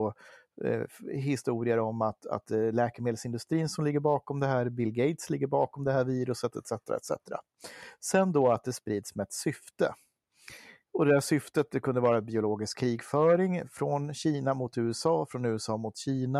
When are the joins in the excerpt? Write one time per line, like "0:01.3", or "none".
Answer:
none